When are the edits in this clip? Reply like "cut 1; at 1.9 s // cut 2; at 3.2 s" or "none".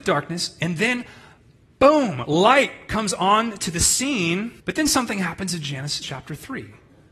cut 1; at 4.6 s // cut 2; at 6.0 s